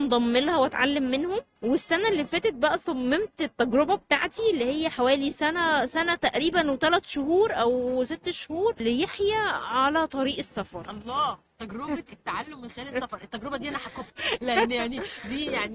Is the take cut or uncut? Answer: uncut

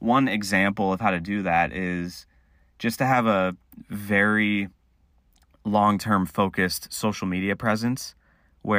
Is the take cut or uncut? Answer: uncut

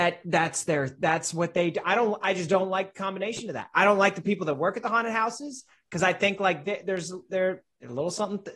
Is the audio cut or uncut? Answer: uncut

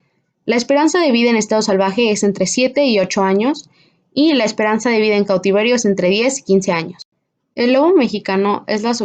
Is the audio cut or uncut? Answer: uncut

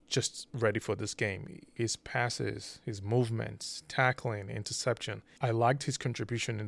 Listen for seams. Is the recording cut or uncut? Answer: cut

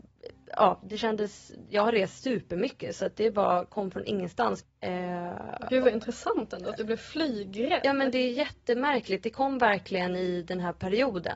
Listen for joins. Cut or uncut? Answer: cut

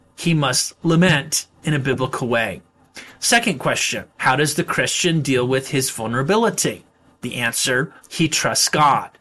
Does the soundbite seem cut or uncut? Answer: cut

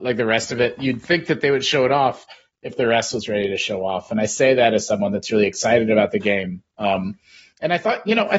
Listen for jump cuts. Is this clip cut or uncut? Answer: uncut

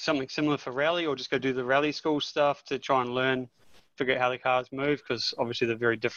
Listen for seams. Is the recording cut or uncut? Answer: uncut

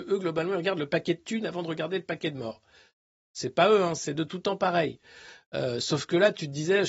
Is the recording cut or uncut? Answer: uncut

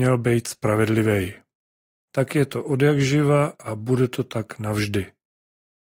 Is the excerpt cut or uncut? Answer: cut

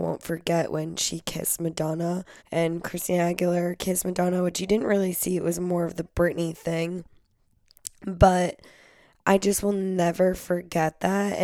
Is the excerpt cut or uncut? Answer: cut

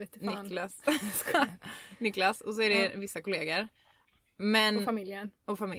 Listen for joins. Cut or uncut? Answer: uncut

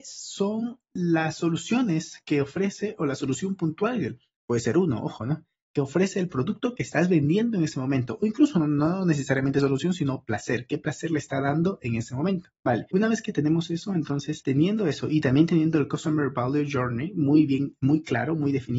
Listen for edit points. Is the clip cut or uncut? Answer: uncut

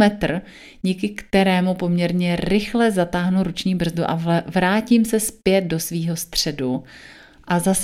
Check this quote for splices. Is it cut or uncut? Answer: uncut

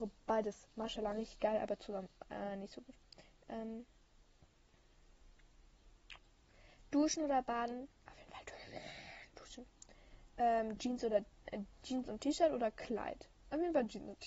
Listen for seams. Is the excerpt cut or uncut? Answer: uncut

